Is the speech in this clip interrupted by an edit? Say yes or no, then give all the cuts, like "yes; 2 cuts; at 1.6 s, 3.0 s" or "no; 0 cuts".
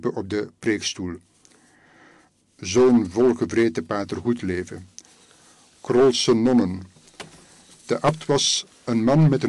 no; 0 cuts